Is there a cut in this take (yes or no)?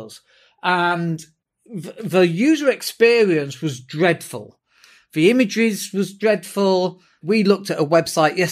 yes